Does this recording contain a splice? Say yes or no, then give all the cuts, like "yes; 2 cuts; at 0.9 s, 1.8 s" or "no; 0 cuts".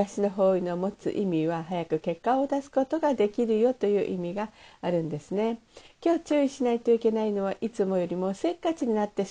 no; 0 cuts